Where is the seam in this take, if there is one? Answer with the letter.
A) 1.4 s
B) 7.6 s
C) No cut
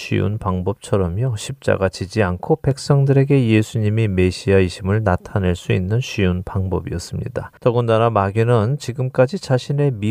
B